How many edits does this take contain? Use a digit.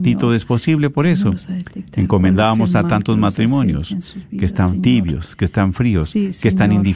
0